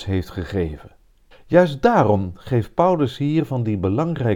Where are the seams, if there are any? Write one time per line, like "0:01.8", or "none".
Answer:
0:01.3